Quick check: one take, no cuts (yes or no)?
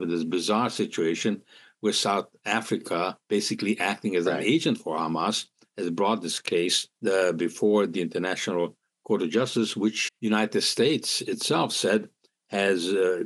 no